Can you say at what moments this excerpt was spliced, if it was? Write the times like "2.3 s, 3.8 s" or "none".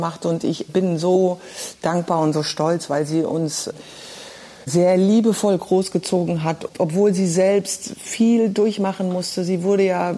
none